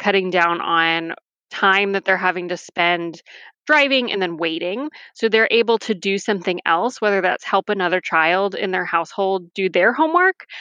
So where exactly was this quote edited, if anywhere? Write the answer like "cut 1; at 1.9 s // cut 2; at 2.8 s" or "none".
none